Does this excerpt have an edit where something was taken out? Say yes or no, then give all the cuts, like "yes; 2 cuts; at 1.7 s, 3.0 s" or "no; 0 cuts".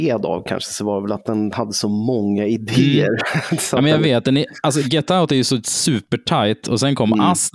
no; 0 cuts